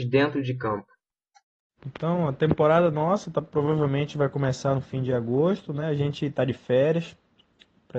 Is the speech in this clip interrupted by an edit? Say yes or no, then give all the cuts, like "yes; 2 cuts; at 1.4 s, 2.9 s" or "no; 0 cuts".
no; 0 cuts